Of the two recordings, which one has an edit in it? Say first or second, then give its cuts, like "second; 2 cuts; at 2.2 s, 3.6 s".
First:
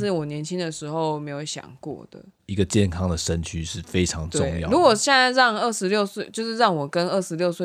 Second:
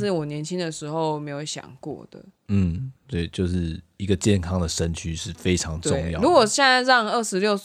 first; 1 cut; at 2.4 s